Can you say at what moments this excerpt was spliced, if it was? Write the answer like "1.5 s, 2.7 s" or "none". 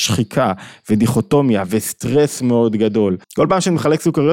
3.2 s